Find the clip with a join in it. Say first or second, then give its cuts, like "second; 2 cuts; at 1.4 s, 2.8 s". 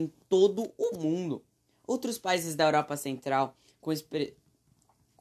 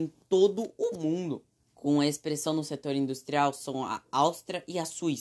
second; 1 cut; at 1.6 s